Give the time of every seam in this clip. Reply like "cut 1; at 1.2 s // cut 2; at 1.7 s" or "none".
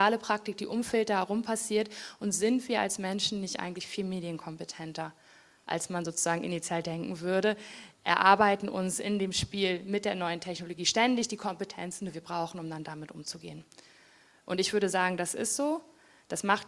cut 1; at 8.0 s